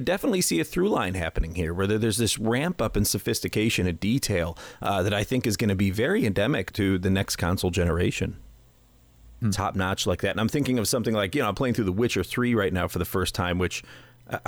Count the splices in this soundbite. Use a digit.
2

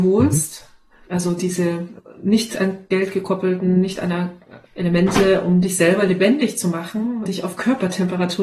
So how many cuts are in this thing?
2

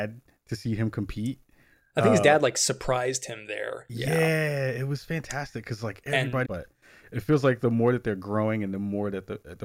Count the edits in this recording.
1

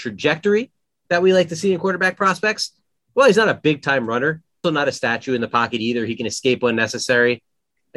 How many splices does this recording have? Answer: 1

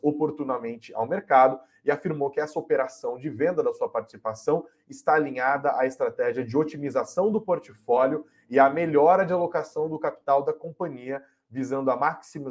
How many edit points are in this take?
0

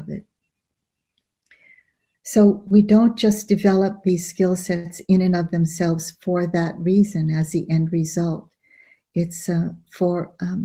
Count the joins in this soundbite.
1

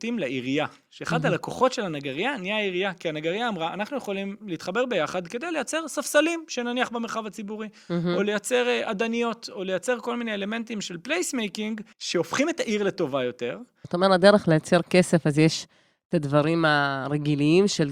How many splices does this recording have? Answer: 2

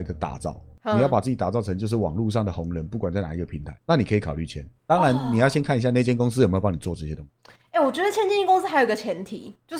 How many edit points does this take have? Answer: 0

